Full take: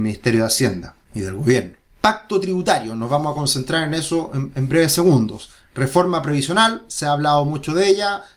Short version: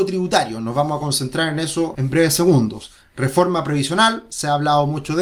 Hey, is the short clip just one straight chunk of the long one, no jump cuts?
no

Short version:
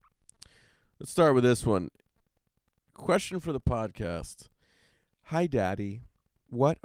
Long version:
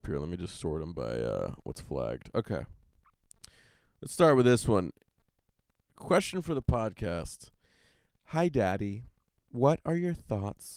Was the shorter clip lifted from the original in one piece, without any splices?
yes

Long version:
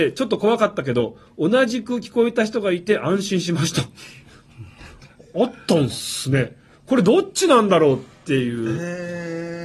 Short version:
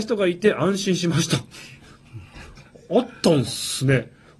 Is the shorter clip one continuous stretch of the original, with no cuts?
yes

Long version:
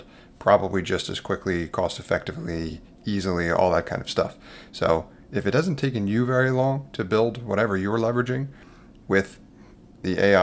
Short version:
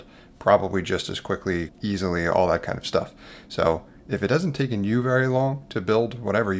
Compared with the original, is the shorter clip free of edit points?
no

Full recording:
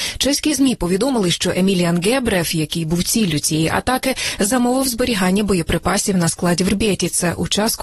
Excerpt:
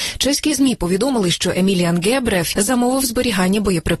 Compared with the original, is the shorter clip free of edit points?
no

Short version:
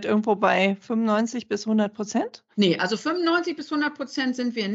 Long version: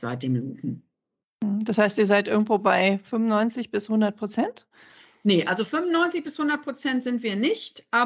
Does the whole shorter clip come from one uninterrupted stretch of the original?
no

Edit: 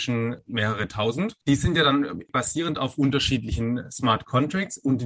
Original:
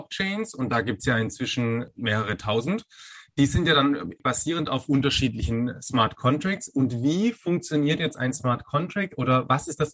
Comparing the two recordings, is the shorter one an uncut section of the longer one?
no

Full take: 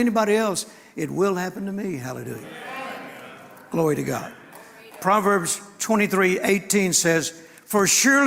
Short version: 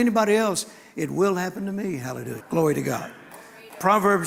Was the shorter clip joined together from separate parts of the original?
yes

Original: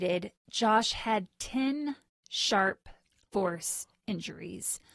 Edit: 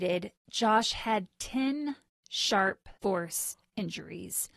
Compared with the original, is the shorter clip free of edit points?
no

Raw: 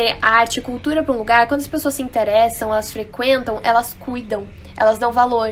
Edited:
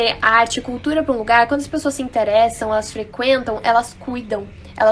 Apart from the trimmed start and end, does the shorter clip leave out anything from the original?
no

